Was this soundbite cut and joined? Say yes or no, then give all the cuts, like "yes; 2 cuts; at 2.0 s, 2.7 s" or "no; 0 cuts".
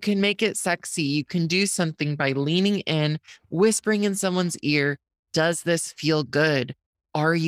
no; 0 cuts